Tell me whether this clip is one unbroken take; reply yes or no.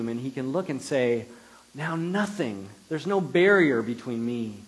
yes